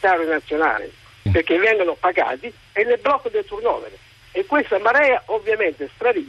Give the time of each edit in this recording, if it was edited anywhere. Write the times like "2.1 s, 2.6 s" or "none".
1.3 s